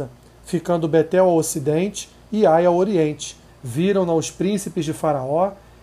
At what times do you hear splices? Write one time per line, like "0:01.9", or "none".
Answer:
0:03.5